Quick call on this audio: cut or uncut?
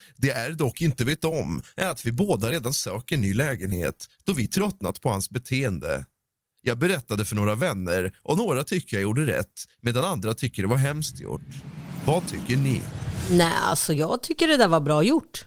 uncut